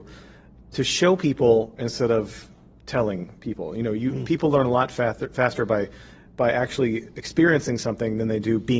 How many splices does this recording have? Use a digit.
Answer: 0